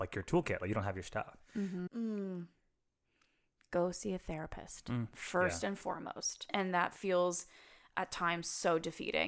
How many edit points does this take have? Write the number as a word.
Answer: two